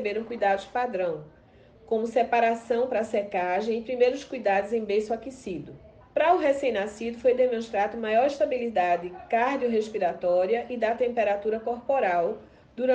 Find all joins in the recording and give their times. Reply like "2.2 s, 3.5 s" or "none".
6.0 s